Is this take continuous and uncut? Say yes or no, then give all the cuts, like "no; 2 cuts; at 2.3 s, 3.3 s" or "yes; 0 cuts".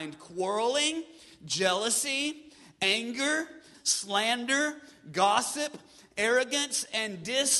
no; 1 cut; at 3.7 s